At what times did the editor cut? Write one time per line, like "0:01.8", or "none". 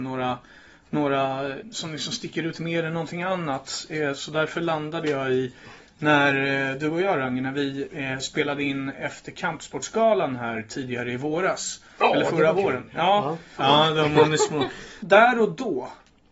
0:13.6
0:15.0